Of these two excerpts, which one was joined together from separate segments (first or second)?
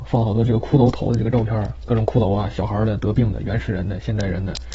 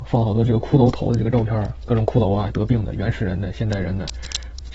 second